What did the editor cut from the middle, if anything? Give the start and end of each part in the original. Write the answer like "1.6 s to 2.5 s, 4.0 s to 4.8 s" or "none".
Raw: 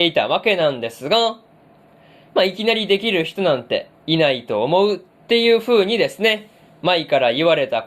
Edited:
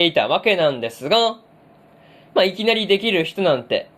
none